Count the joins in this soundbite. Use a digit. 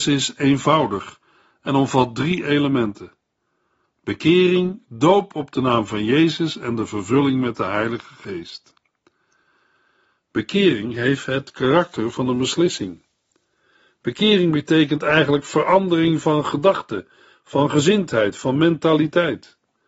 0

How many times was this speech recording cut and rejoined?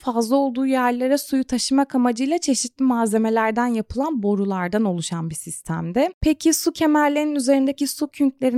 1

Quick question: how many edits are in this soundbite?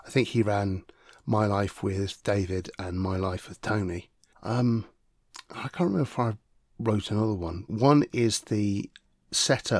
2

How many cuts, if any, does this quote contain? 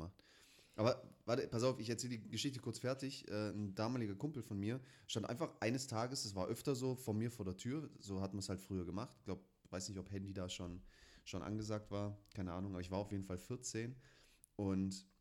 0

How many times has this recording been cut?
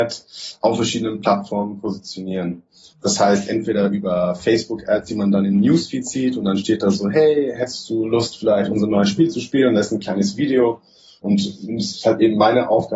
1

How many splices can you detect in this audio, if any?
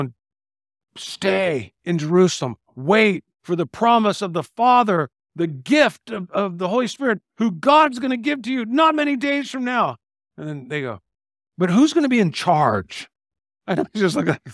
1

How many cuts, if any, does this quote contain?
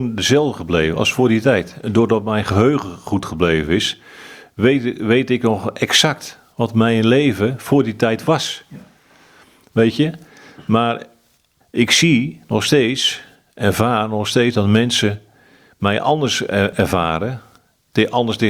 0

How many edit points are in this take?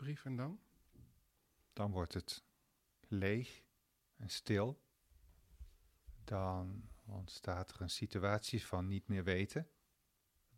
0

